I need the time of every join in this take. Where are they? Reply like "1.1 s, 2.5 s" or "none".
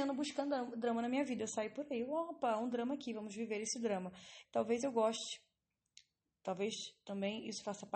4.4 s